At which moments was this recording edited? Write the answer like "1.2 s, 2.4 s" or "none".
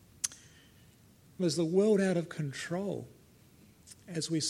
1.4 s